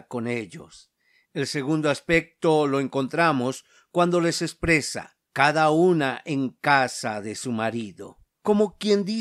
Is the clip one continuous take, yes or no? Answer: no